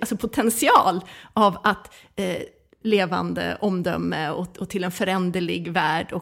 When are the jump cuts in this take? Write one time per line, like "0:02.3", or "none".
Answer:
0:02.8